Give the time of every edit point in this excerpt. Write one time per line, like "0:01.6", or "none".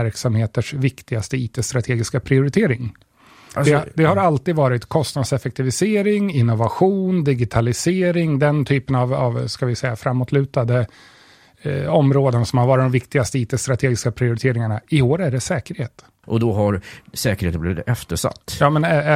0:16.2